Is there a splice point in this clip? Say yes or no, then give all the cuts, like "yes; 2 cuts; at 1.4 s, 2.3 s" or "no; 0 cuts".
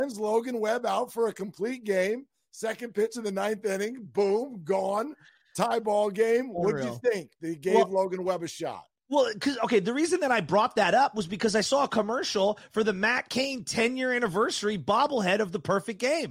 no; 0 cuts